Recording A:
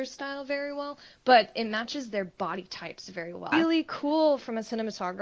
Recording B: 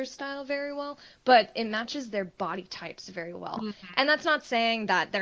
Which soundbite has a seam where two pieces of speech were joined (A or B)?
A